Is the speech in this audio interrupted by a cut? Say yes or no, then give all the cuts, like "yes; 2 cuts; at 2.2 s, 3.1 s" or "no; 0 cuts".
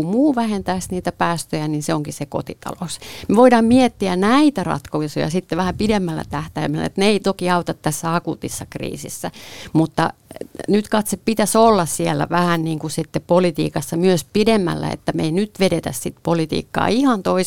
no; 0 cuts